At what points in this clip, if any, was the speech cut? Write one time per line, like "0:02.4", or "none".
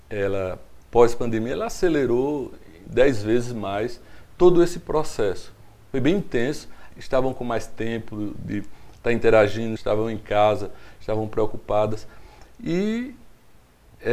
0:06.9
0:09.8